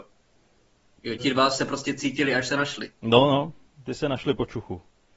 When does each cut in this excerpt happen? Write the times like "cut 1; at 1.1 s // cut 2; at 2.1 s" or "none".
cut 1; at 1.2 s